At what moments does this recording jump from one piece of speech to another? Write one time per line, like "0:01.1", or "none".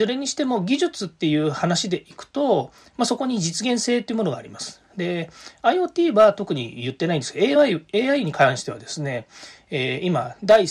none